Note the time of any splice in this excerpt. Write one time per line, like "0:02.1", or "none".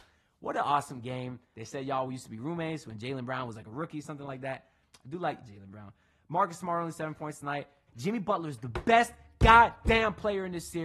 0:01.5
0:07.9